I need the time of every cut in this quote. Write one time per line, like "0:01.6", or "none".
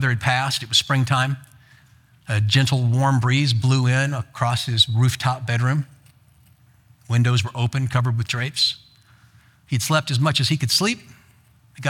none